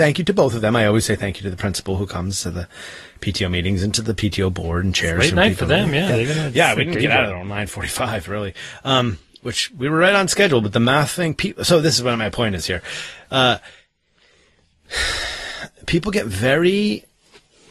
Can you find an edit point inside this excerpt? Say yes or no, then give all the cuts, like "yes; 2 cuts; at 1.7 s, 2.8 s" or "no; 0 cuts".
no; 0 cuts